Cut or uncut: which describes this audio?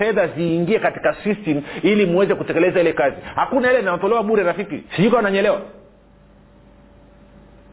cut